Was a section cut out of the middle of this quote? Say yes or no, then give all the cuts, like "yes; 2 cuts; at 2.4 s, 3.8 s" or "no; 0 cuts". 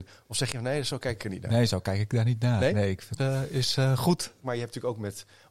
yes; 2 cuts; at 3.2 s, 4.4 s